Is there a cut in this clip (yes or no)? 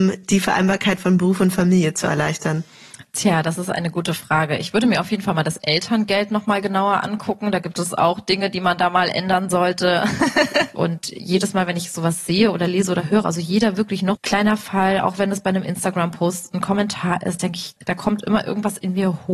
yes